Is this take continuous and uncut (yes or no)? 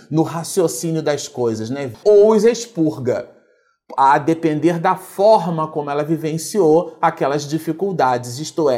no